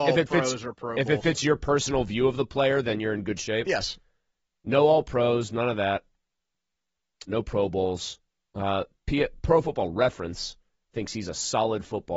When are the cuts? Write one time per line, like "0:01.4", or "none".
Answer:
0:07.3